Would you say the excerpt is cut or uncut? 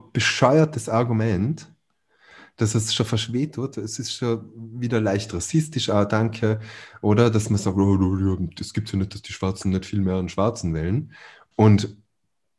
cut